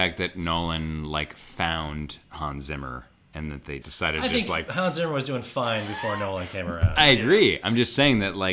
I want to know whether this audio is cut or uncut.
cut